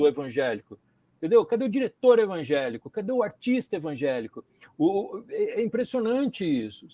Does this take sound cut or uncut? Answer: uncut